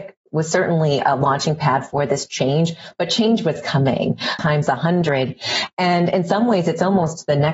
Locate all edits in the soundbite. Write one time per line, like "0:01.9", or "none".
0:04.4